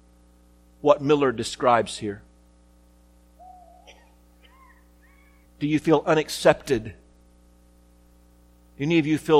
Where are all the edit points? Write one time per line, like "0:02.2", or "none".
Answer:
0:05.5